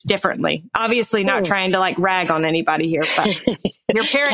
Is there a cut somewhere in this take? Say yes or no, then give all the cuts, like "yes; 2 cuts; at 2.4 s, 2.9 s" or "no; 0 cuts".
no; 0 cuts